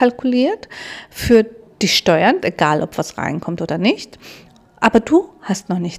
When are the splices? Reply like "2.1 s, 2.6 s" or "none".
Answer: 2.4 s